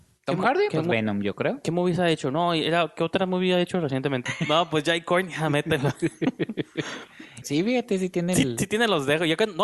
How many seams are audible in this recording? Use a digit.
2